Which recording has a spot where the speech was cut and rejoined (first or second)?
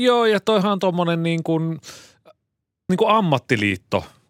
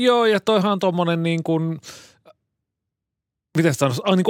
first